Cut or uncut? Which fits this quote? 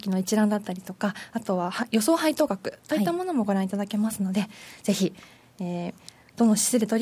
uncut